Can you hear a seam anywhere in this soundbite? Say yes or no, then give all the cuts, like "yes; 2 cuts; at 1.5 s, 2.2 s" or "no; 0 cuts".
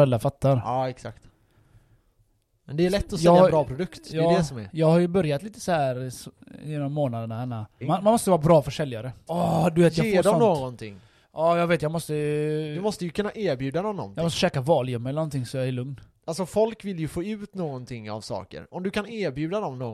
yes; 2 cuts; at 7.8 s, 9.3 s